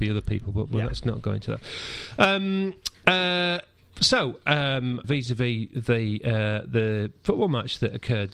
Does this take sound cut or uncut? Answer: cut